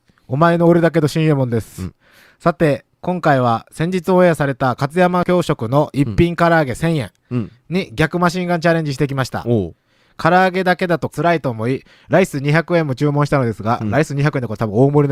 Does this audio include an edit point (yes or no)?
no